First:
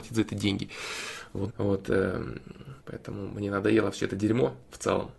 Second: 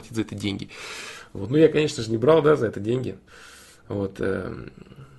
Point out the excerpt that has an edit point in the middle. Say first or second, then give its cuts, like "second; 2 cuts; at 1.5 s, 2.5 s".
first; 2 cuts; at 1.5 s, 2.8 s